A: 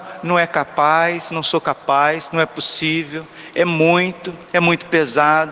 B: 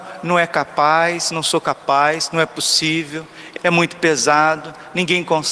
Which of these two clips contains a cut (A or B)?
B